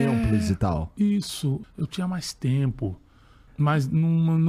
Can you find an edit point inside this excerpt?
yes; 2 cuts; at 1.6 s, 3.5 s

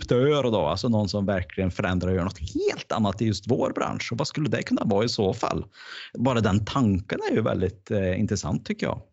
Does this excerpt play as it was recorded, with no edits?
no; 1 cut; at 1.3 s

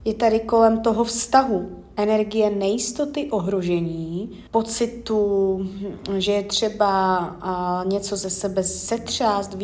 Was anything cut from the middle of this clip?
yes; 1 cut; at 4.5 s

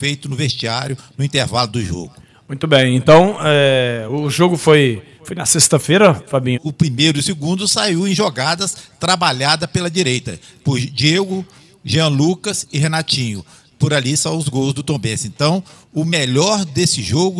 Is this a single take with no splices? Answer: no; 1 cut; at 6.5 s

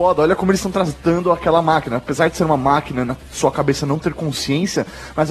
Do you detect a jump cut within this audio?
no; 0 cuts

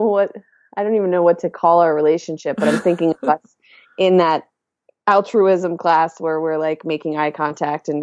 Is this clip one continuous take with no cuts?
yes; 0 cuts

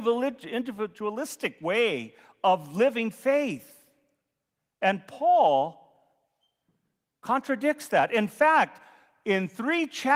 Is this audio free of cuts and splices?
yes; 0 cuts

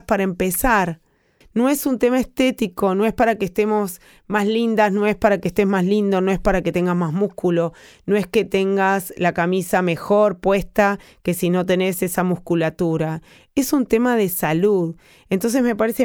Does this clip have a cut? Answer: yes; 1 cut; at 1.4 s

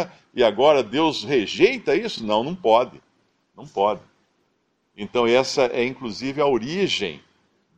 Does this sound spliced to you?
no; 0 cuts

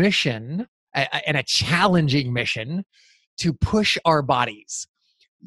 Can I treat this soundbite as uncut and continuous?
yes; 0 cuts

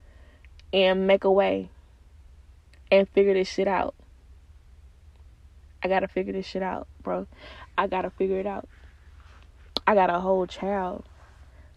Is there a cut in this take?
no; 0 cuts

